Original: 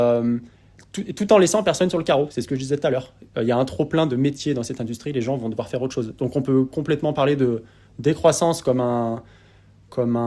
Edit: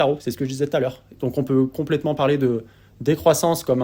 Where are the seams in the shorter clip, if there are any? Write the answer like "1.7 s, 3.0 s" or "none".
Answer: 1.2 s